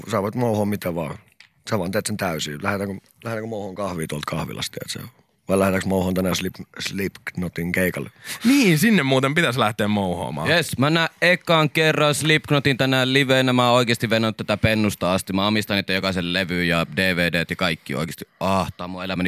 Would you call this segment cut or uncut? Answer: uncut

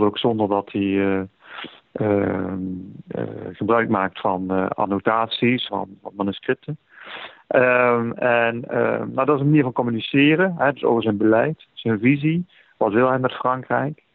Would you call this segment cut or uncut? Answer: cut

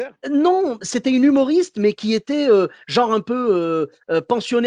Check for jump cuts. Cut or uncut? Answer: uncut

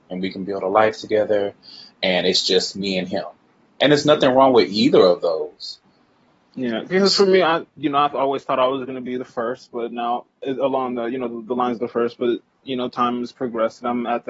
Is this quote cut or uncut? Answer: cut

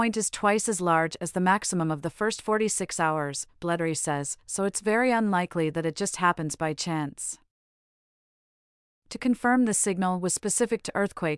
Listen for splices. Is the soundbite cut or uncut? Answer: uncut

